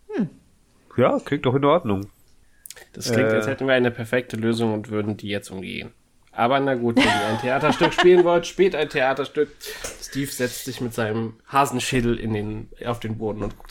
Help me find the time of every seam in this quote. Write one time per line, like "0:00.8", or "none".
none